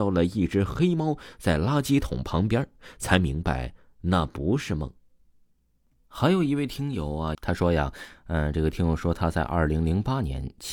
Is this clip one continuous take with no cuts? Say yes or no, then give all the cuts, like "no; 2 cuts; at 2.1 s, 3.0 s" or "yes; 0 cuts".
no; 1 cut; at 7.3 s